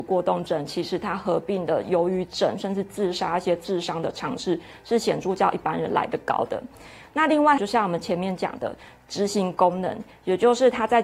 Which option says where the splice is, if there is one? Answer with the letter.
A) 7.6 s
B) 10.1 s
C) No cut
A